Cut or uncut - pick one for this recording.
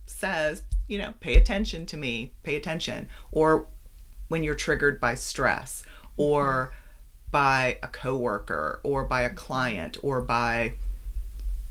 uncut